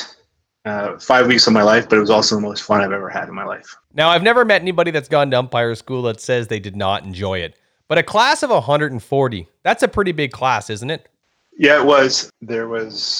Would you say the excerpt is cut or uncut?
cut